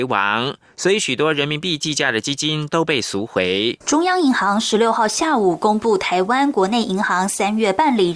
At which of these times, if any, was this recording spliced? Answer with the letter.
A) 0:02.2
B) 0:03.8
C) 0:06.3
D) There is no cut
B